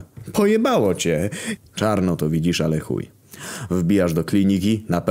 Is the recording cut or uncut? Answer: cut